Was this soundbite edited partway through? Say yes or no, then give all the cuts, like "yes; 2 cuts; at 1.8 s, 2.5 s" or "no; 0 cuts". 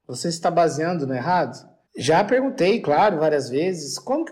yes; 1 cut; at 1.9 s